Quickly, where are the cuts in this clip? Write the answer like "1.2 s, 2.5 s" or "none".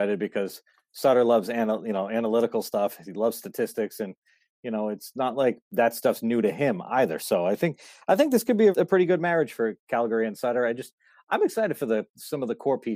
8.7 s